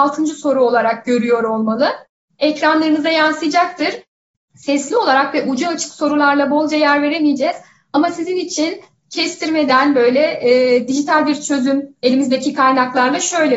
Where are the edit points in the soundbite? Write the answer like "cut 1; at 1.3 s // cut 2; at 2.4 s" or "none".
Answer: cut 1; at 4.3 s